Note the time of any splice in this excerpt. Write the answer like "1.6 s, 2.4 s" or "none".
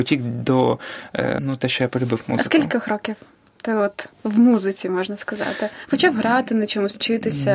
1.4 s